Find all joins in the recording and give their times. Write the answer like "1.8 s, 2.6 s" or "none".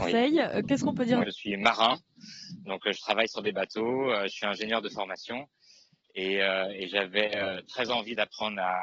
1.2 s